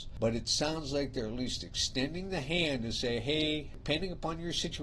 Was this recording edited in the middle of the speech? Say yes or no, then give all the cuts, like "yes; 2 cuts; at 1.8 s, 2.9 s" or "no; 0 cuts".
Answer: no; 0 cuts